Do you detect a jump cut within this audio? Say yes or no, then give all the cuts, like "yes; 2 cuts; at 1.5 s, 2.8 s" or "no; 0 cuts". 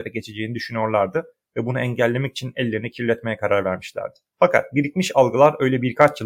yes; 1 cut; at 4.3 s